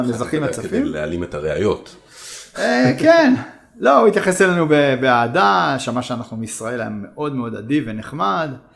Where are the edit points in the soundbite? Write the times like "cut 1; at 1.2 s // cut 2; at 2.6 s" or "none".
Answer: none